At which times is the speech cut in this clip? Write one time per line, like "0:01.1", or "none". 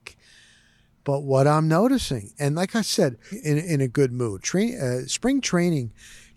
0:03.3
0:04.4